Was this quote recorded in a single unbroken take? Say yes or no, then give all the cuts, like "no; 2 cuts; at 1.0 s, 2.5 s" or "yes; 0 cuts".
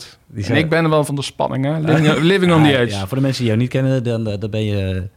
no; 1 cut; at 1.1 s